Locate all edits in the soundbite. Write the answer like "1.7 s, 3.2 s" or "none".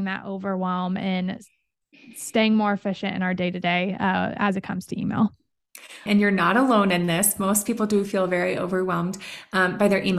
6.1 s